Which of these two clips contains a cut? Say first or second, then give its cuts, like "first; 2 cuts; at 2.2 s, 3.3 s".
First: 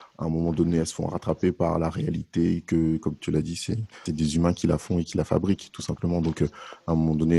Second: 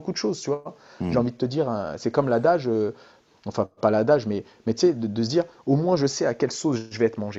first; 1 cut; at 4.1 s